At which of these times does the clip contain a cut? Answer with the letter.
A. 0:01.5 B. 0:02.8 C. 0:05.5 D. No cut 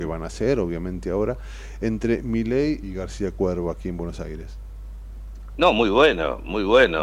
B